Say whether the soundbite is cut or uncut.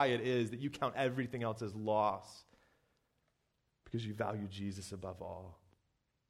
uncut